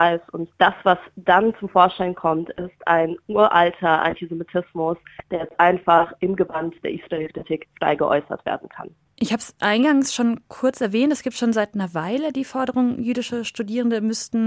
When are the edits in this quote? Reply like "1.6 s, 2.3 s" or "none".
none